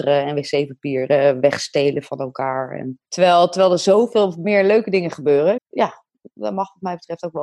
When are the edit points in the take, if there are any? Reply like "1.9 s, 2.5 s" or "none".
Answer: 5.6 s